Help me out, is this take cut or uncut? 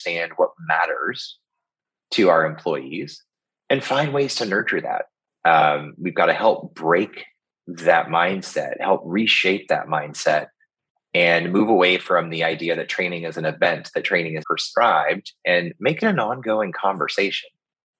cut